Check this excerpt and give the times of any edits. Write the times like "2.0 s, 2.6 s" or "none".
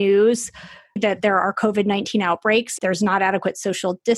2.8 s